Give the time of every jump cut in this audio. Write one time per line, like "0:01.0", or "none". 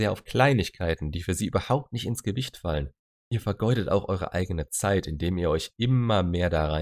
none